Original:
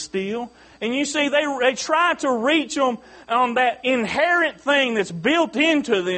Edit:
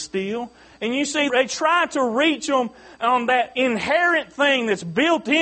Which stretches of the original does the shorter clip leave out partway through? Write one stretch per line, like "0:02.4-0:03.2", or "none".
0:01.3-0:01.6